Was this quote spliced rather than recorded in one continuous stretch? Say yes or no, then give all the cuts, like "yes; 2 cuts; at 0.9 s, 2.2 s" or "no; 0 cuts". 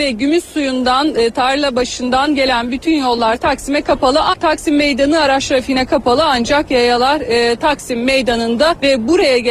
yes; 1 cut; at 4.3 s